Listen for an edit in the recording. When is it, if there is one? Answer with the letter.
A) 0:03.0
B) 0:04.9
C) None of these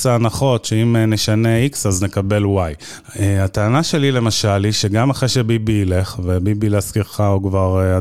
A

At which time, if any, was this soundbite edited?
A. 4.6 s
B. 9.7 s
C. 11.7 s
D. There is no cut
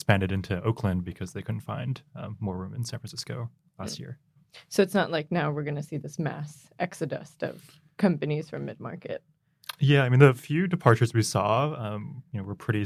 D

